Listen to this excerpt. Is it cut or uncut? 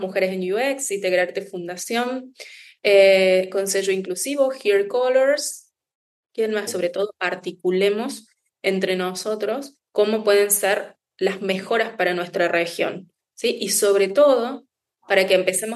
cut